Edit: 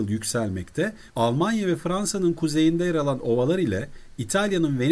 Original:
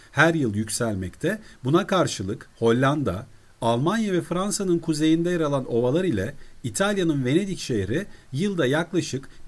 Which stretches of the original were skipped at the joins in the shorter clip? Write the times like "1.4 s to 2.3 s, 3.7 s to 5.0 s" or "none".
1.6 s to 3.6 s